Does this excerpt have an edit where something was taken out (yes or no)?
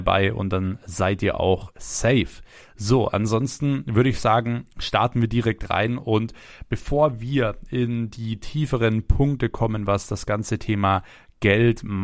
no